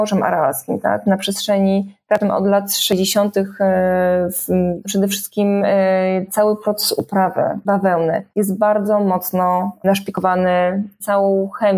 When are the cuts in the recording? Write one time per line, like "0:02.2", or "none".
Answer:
0:04.8
0:08.3